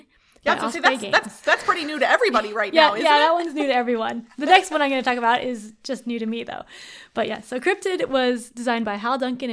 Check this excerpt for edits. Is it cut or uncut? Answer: uncut